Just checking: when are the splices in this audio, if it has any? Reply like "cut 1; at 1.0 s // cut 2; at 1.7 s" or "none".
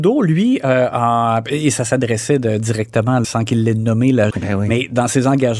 cut 1; at 3.2 s // cut 2; at 4.3 s